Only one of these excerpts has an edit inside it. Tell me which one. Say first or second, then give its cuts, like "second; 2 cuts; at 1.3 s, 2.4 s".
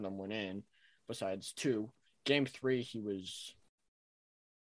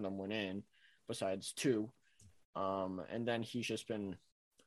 first; 1 cut; at 2.1 s